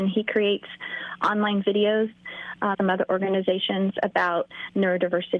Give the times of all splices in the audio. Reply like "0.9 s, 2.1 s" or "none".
2.7 s